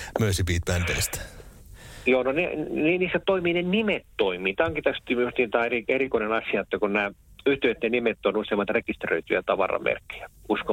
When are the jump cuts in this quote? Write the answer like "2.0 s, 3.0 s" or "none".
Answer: none